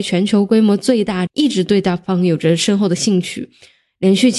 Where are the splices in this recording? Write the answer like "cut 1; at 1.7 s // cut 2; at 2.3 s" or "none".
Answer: cut 1; at 1.3 s